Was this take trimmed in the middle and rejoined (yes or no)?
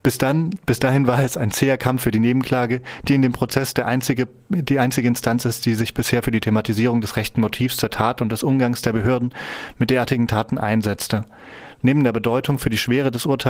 no